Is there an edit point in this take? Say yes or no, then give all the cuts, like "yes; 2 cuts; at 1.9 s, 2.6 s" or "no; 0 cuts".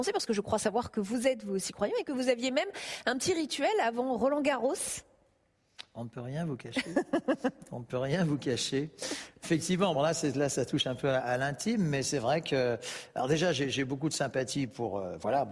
yes; 2 cuts; at 9.9 s, 11.2 s